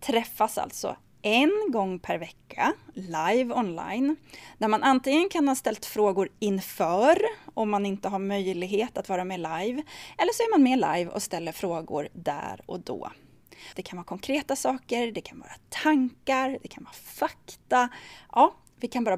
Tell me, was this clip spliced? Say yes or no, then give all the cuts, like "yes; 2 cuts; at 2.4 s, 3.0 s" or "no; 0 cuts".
yes; 1 cut; at 13.7 s